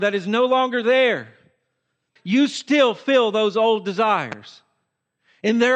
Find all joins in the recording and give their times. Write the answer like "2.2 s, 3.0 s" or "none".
2.2 s